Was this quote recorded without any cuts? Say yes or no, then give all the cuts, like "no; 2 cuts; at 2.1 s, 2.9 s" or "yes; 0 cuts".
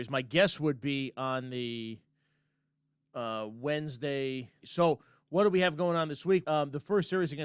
no; 2 cuts; at 4.6 s, 6.4 s